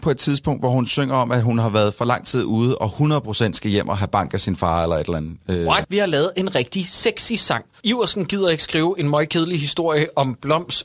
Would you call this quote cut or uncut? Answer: cut